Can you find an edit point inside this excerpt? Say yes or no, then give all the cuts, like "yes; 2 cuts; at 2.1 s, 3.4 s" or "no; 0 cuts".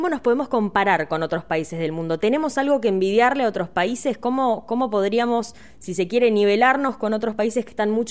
no; 0 cuts